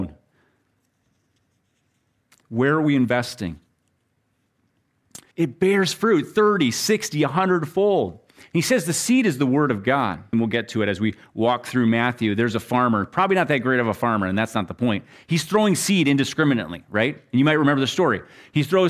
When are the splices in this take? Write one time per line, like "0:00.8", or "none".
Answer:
0:05.3
0:10.3